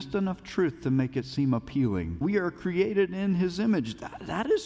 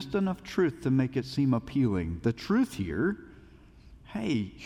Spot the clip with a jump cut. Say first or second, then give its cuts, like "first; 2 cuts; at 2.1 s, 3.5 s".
first; 1 cut; at 2.2 s